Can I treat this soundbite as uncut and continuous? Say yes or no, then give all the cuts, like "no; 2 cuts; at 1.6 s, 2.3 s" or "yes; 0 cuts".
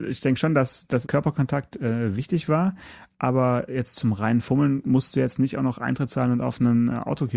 no; 1 cut; at 1.0 s